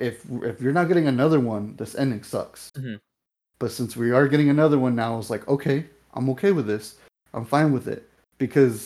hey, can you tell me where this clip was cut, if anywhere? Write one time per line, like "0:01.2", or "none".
0:02.7